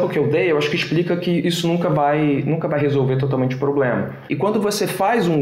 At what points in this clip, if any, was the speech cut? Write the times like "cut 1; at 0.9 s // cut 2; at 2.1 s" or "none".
none